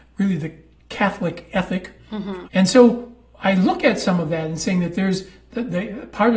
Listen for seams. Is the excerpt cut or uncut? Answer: cut